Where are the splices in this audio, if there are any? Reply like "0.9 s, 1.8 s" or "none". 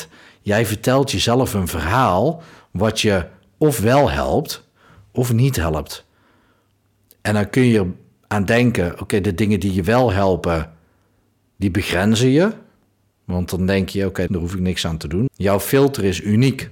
14.3 s, 15.3 s